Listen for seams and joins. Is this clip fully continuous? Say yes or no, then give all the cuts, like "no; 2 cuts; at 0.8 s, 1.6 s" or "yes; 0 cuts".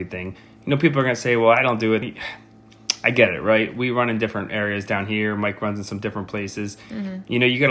no; 1 cut; at 2.0 s